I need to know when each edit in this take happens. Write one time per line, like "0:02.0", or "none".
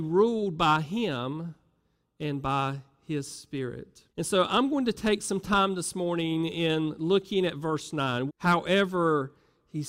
0:04.1
0:08.3